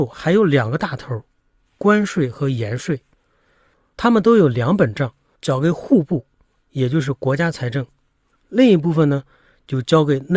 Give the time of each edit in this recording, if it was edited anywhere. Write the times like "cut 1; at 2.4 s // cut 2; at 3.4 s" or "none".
cut 1; at 5.4 s